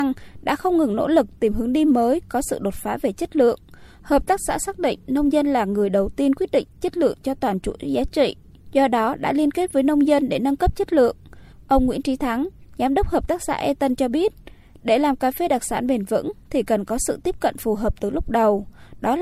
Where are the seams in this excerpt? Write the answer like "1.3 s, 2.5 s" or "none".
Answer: 11.5 s